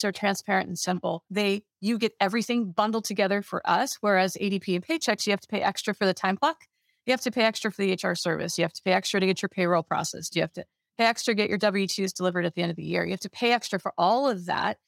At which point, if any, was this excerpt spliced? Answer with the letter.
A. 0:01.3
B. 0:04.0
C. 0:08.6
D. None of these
A